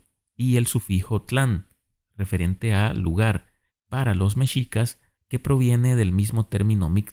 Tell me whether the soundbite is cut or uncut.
cut